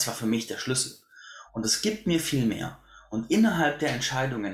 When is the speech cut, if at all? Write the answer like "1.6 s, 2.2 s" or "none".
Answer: 1.5 s